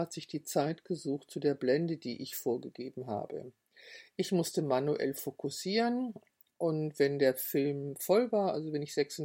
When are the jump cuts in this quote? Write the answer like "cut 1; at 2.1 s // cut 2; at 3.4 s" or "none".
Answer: none